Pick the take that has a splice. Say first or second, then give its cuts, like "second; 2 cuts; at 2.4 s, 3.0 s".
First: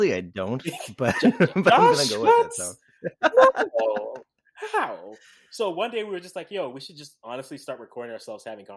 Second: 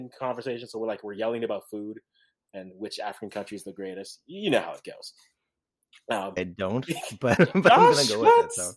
second; 2 cuts; at 6.4 s, 7.4 s